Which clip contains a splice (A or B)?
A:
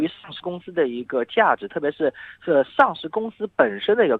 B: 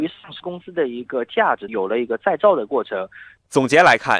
B